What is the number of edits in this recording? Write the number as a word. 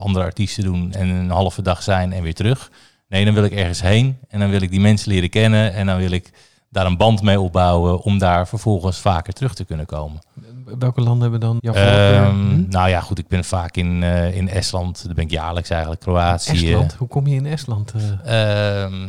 two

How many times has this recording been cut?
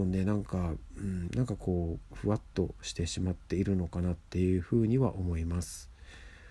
one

